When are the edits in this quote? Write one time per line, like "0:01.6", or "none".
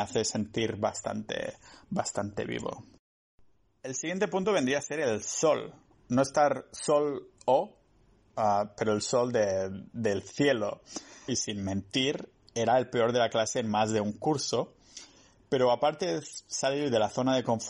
0:11.3